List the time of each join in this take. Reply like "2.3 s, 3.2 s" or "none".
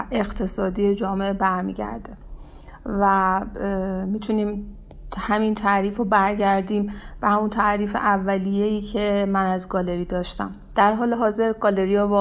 none